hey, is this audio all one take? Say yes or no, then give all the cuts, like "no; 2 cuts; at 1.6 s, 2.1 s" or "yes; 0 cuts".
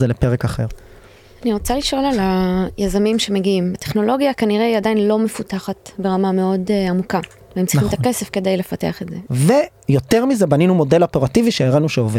no; 2 cuts; at 3.7 s, 9.3 s